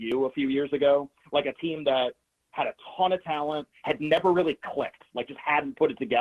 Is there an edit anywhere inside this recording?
yes; 1 cut; at 3.7 s

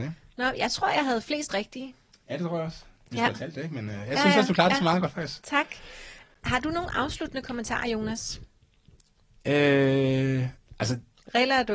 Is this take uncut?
yes; 0 cuts

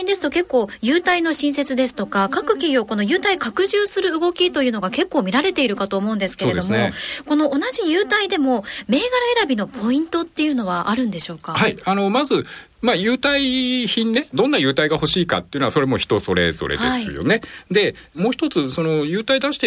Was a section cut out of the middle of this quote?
no; 0 cuts

